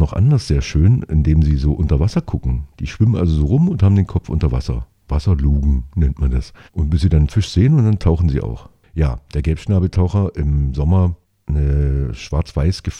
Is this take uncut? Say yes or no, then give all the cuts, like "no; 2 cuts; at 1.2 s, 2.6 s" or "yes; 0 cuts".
no; 1 cut; at 8.8 s